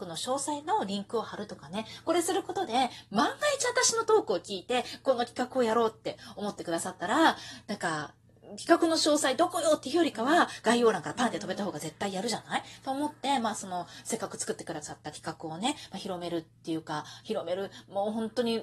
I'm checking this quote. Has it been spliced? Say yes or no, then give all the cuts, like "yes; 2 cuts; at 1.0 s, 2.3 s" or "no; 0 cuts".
no; 0 cuts